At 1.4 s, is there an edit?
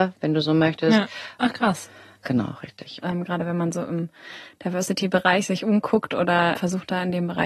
yes; 2 cuts; at 1.4 s, 3.0 s

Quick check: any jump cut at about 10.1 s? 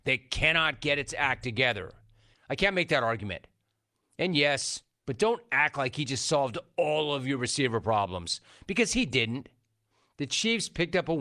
no; 2 cuts; at 2.3 s, 5.0 s

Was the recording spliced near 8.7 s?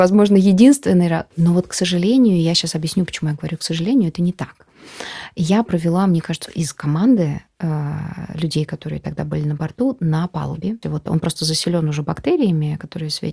no; 3 cuts; at 1.3 s, 6.5 s, 10.8 s

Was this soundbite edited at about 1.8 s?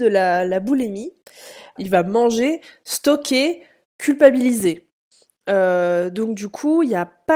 yes; 1 cut; at 1.8 s

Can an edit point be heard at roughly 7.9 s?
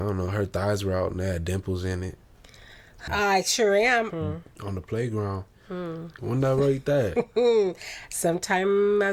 no; 3 cuts; at 3.1 s, 4.1 s, 6.2 s

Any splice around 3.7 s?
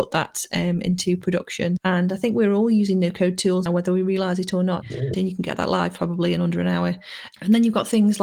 yes; 2 cuts; at 3.7 s, 4.8 s

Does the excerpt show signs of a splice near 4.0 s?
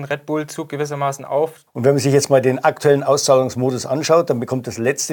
no; 1 cut; at 1.7 s

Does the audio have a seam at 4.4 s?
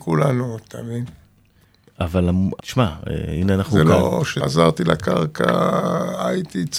yes; 2 cuts; at 2.6 s, 4.4 s

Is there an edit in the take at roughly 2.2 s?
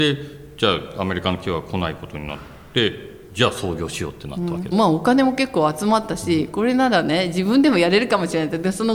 no; 1 cut; at 4.7 s

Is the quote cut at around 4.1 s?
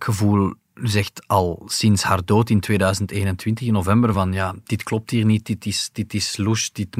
no; 0 cuts

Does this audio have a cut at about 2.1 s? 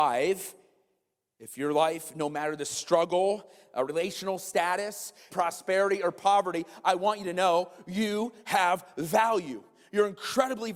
no; 1 cut; at 5.3 s

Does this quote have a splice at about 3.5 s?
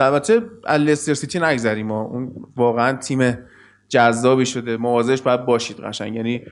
no; 0 cuts

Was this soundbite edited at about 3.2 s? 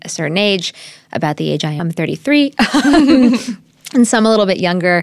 no; 1 cut; at 1.8 s

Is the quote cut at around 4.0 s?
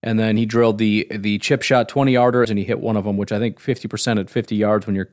no; 1 cut; at 2.4 s

